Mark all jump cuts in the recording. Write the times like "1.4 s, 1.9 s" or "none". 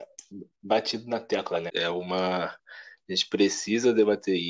1.7 s